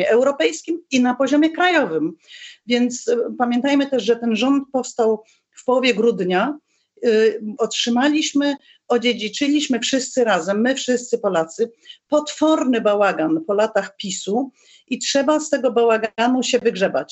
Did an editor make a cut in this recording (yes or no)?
yes